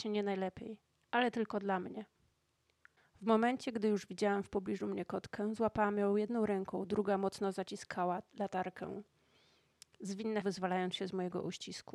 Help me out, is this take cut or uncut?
cut